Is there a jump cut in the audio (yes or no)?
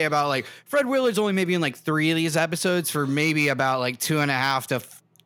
no